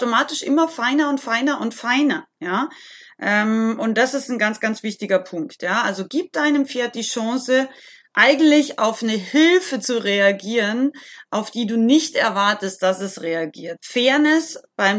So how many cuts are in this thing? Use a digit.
1